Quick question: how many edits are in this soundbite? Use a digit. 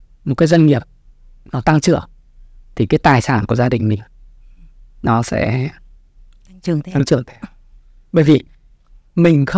0